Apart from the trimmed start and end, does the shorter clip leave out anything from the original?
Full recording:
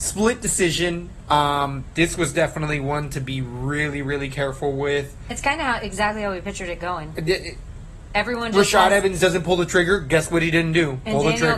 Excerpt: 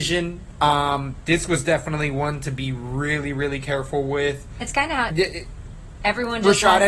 yes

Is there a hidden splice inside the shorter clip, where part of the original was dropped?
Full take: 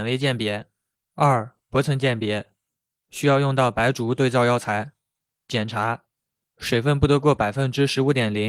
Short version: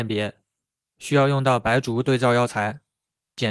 no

